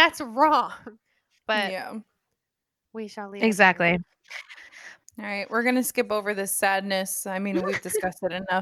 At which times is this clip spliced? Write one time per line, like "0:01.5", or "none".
0:05.0